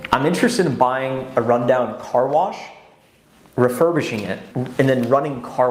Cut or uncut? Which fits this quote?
cut